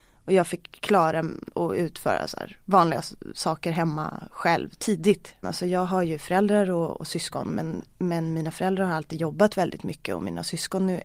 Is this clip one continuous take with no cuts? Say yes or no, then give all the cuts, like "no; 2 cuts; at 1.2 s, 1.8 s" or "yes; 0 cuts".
no; 1 cut; at 5.4 s